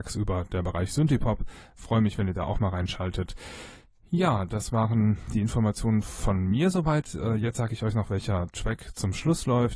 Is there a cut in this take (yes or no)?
no